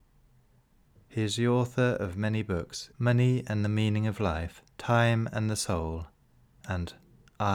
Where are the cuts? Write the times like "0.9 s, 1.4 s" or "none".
2.9 s, 4.7 s